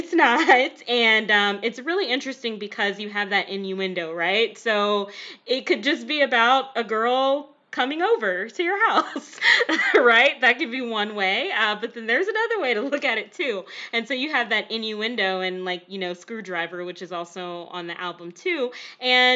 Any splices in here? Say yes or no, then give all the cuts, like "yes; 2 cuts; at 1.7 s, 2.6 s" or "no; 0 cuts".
no; 0 cuts